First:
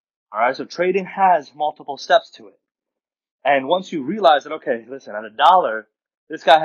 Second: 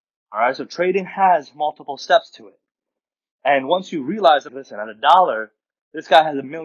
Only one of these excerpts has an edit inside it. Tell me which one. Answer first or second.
second